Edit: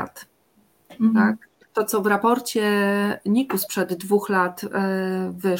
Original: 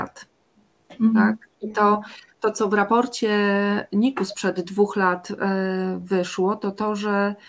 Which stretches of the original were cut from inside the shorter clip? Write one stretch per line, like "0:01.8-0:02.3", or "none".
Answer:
0:01.6-0:02.3